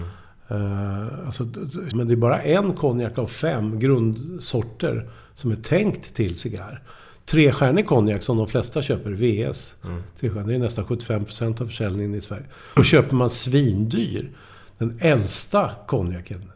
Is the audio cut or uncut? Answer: cut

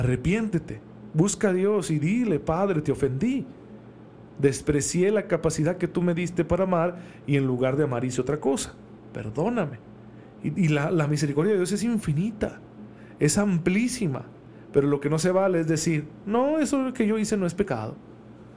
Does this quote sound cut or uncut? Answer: cut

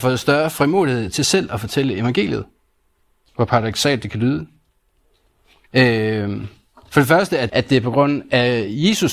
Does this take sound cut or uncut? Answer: cut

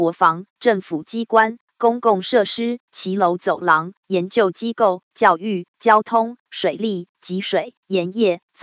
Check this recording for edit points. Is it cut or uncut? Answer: uncut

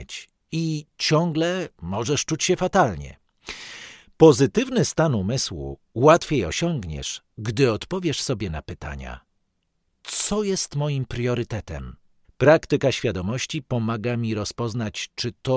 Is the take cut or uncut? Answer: cut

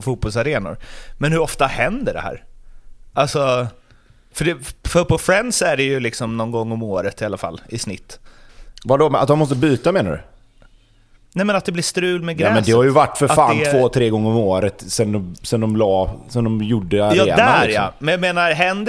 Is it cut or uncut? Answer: uncut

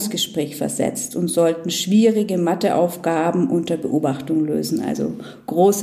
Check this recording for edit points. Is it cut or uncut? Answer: uncut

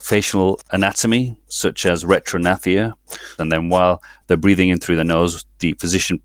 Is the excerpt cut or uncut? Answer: cut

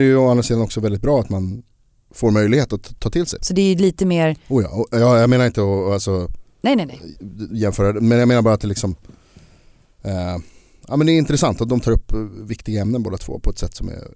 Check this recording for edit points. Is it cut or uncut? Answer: cut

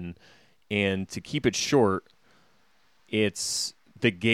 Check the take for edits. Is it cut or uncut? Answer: uncut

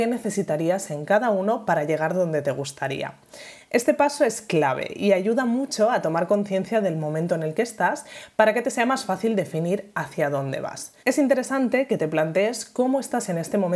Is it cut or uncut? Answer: cut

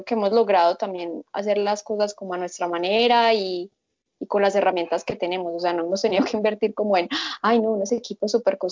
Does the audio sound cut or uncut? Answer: uncut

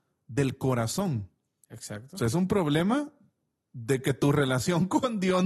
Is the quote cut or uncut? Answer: uncut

